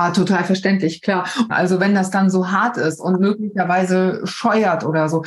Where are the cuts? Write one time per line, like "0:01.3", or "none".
0:01.5